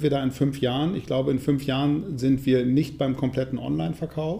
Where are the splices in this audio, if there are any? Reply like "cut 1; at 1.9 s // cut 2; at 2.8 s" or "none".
none